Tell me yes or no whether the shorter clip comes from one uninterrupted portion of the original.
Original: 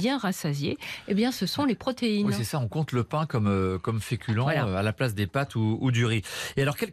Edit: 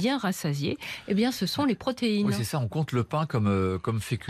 yes